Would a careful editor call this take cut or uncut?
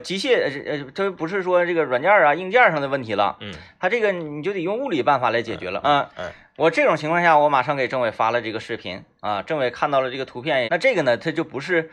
cut